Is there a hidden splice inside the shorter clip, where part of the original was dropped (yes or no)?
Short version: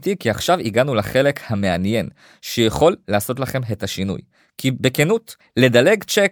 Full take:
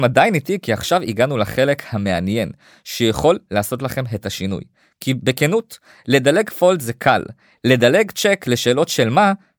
yes